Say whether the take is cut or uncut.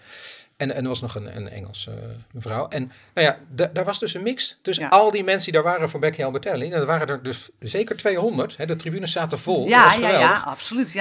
uncut